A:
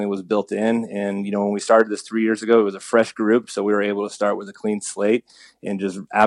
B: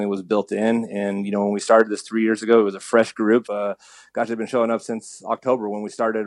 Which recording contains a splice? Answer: B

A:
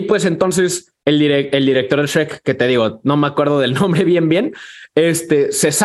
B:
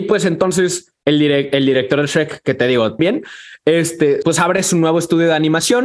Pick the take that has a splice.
B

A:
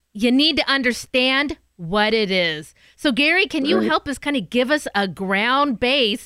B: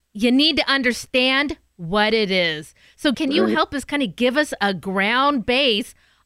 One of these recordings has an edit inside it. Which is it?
B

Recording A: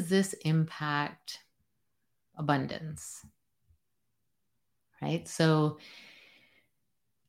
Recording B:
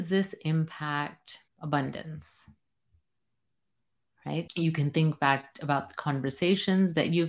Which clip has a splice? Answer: B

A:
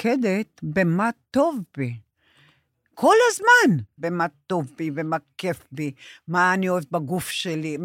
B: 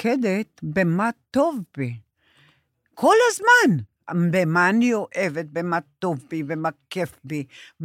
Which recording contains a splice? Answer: A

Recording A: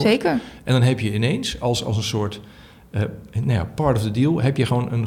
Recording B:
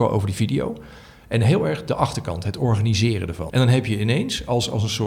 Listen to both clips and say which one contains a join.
B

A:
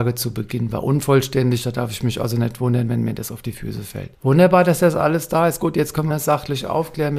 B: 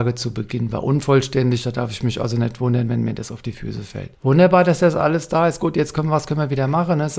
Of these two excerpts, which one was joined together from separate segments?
A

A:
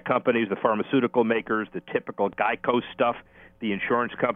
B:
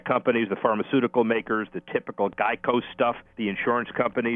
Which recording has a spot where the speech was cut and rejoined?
B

